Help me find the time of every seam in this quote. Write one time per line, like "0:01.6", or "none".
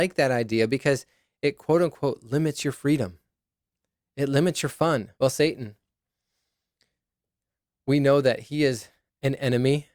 0:05.1